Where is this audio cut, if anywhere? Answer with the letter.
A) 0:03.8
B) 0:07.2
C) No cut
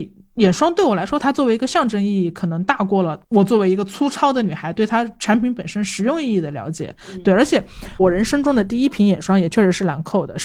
C